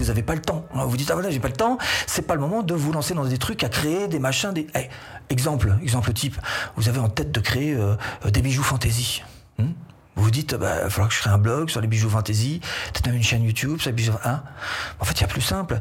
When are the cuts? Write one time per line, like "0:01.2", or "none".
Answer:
none